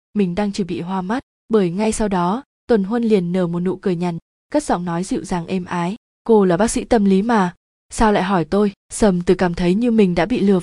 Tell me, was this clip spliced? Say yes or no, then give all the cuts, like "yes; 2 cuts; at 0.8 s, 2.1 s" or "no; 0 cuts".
yes; 2 cuts; at 4.2 s, 8.8 s